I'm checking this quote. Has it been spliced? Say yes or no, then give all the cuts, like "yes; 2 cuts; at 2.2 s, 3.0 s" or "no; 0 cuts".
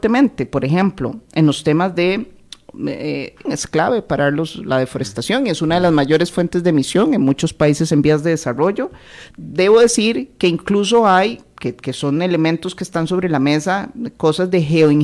yes; 2 cuts; at 3.5 s, 9.3 s